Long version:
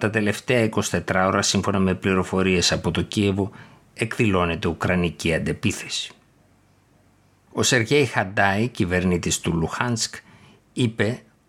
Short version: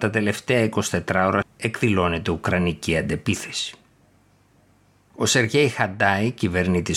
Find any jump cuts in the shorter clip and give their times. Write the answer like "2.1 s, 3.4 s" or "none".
1.4 s

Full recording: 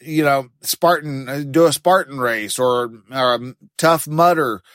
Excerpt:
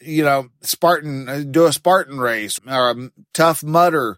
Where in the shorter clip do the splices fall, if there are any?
2.6 s

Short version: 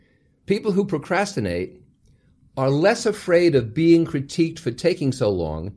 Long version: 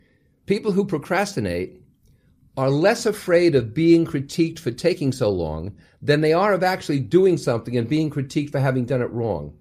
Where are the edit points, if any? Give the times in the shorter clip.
none

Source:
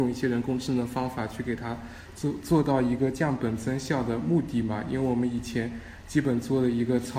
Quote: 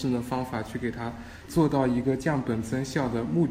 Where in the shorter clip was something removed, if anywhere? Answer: 1.5 s

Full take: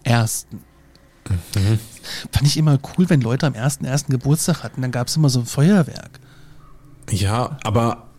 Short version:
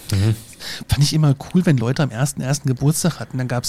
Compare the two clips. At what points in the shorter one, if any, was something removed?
none

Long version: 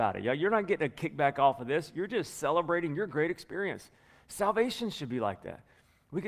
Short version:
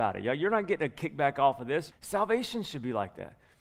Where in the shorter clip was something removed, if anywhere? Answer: 1.9 s

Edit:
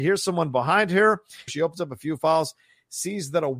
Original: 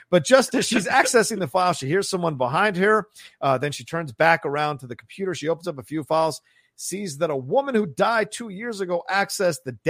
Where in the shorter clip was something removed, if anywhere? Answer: 1.5 s

